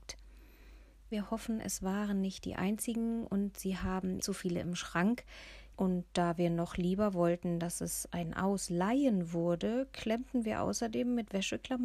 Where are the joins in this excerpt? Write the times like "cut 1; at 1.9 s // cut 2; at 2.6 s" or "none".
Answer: cut 1; at 1.1 s // cut 2; at 4.2 s // cut 3; at 5.7 s